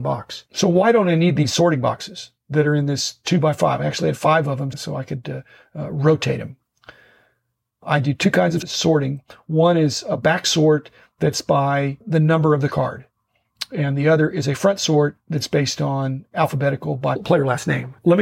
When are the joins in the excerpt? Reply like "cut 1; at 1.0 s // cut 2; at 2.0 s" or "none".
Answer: none